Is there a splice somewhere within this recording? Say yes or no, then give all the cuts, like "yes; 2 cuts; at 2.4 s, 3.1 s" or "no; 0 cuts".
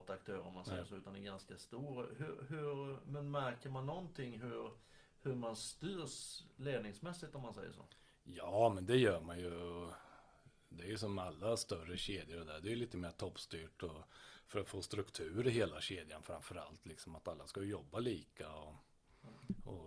no; 0 cuts